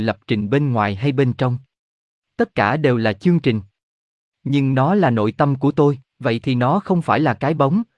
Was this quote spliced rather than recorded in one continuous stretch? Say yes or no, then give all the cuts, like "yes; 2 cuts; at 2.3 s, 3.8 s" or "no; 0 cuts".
yes; 1 cut; at 6.1 s